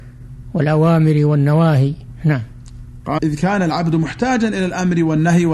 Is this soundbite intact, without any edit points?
no; 1 cut; at 3.2 s

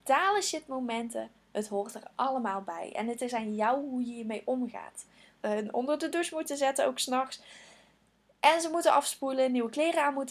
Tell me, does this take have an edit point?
yes; 1 cut; at 5.4 s

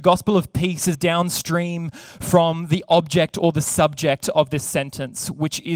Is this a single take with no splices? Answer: no; 1 cut; at 0.9 s

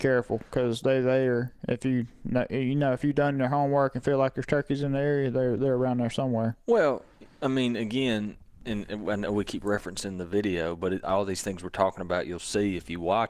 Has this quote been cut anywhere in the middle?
no; 0 cuts

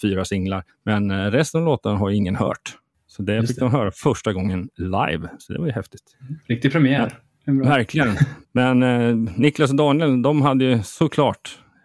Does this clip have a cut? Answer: yes; 1 cut; at 8.4 s

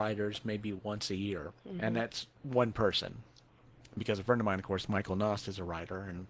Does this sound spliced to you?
no; 0 cuts

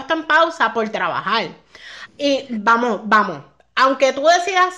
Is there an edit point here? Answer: yes; 1 cut; at 2.1 s

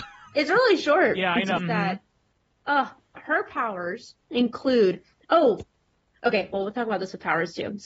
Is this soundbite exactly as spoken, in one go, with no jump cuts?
no; 3 cuts; at 1.6 s, 3.1 s, 4.2 s

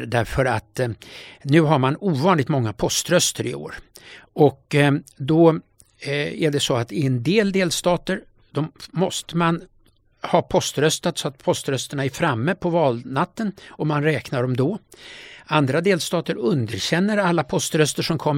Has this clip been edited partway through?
no; 0 cuts

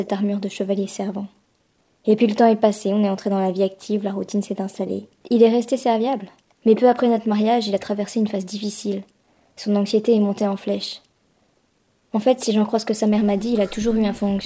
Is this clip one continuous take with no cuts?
yes; 0 cuts

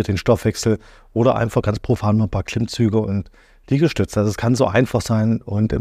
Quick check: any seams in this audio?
no; 0 cuts

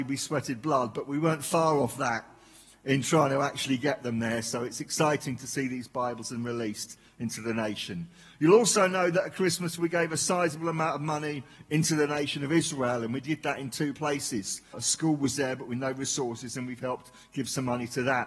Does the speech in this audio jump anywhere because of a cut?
yes; 1 cut; at 14.7 s

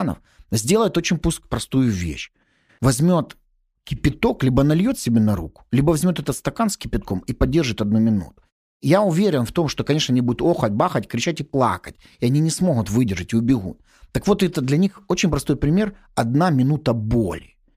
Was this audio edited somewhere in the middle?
no; 0 cuts

